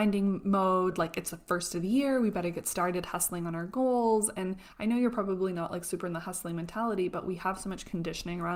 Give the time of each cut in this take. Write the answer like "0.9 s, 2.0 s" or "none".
none